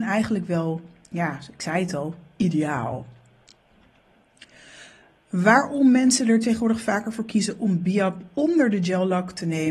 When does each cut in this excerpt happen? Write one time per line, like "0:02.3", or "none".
none